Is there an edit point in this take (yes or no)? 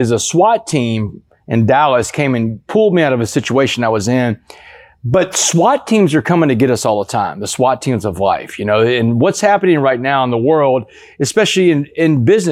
no